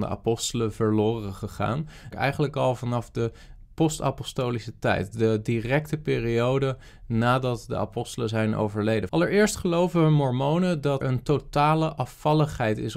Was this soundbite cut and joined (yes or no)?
yes